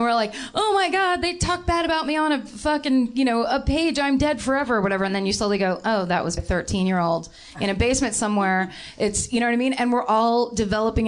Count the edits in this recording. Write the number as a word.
one